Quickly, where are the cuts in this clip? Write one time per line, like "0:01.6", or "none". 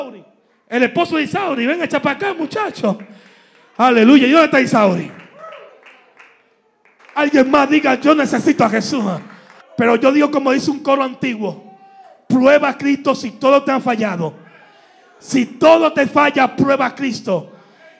0:07.0
0:09.6